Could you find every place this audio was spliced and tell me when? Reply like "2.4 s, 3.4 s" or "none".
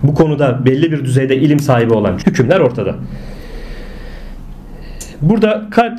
2.2 s